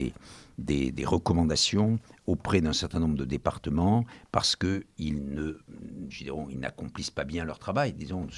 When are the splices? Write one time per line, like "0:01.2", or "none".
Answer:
none